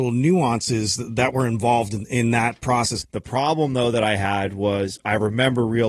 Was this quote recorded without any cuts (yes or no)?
no